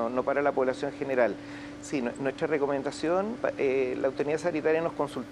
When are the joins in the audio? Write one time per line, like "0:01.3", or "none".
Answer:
0:01.8
0:03.4